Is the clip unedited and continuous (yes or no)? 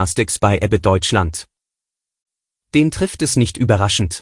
no